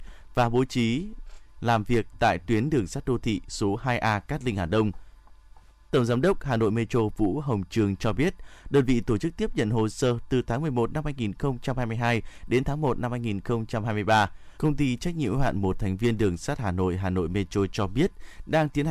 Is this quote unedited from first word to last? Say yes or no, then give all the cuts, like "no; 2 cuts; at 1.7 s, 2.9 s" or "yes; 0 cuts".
no; 2 cuts; at 5.9 s, 14.6 s